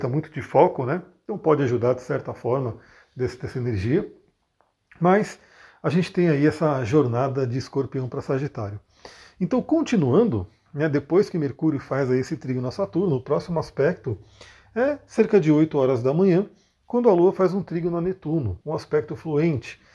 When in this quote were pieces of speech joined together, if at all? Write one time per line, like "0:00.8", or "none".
0:18.6